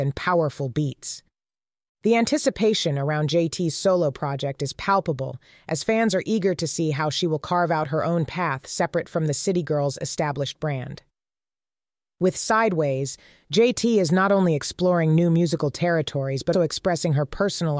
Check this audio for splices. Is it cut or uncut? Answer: cut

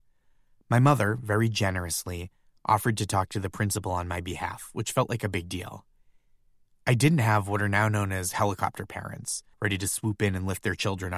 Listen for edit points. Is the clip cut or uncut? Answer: cut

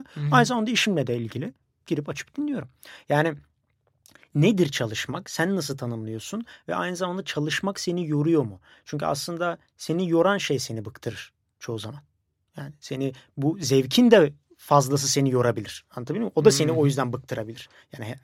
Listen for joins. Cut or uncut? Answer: uncut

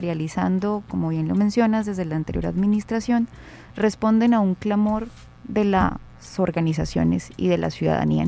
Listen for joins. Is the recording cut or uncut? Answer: uncut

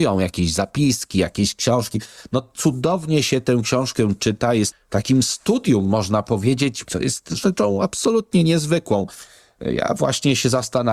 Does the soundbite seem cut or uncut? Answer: cut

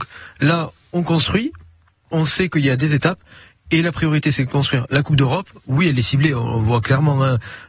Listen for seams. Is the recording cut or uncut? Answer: uncut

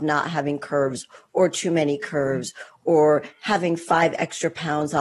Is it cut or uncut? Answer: uncut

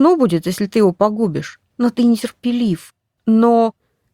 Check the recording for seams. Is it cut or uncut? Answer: cut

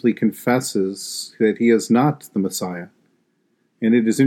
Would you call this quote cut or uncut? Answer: uncut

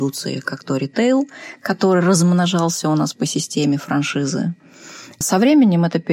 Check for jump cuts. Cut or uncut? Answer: cut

